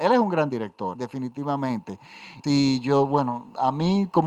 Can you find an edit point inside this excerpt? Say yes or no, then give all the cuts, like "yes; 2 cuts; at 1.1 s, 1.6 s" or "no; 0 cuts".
yes; 2 cuts; at 0.9 s, 2.4 s